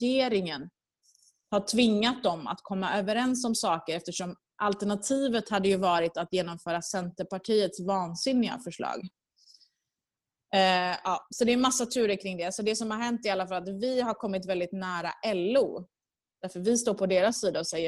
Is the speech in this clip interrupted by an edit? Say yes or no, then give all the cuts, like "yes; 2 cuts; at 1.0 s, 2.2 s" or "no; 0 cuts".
no; 0 cuts